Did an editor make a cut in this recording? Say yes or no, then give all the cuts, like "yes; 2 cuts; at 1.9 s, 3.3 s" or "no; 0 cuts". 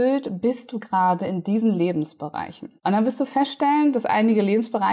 yes; 1 cut; at 2.8 s